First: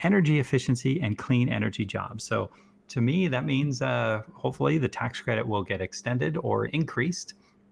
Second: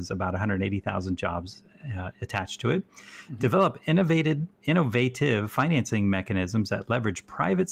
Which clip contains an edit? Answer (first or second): first